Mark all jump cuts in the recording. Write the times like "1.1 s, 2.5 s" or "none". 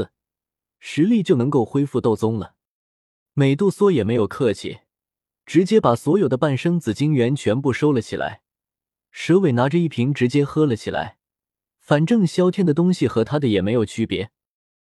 none